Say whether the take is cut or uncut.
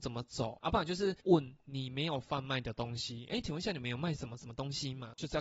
uncut